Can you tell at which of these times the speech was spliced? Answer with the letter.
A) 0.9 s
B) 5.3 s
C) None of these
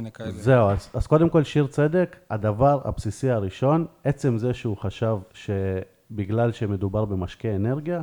B